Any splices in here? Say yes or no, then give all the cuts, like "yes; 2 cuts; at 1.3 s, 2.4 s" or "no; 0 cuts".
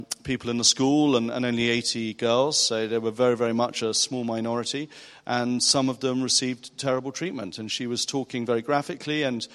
no; 0 cuts